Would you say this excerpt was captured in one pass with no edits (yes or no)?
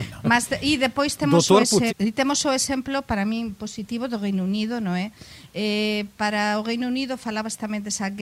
no